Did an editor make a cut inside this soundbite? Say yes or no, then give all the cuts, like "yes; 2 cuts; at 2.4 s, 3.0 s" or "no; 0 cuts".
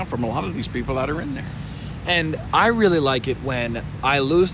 no; 0 cuts